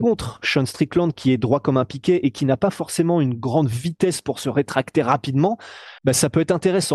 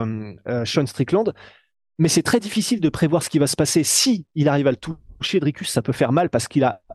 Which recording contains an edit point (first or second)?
first